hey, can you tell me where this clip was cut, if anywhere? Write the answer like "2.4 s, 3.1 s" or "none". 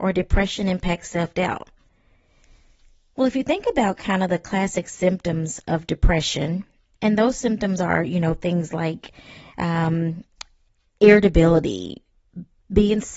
none